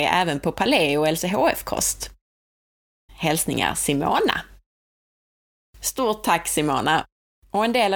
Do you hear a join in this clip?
yes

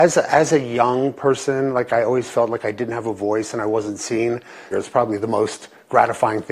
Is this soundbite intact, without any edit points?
no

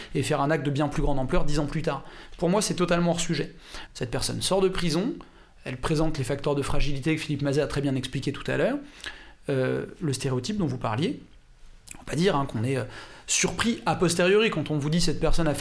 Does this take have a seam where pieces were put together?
yes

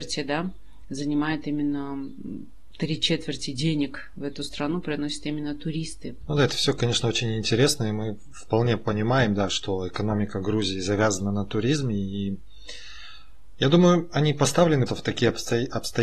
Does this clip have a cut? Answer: yes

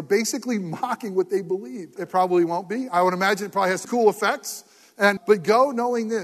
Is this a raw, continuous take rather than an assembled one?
no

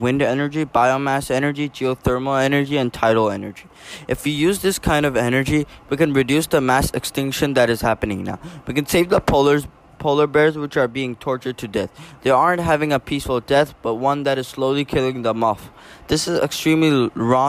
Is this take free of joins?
yes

